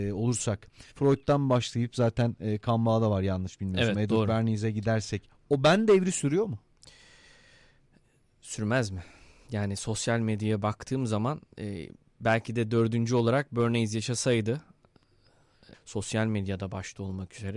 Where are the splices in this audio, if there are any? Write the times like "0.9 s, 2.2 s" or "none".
0.9 s, 15.7 s